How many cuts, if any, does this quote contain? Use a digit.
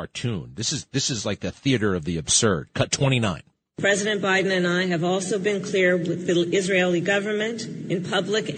0